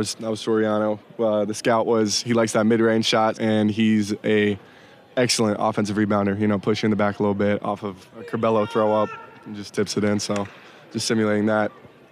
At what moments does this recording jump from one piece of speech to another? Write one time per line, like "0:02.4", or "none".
0:03.3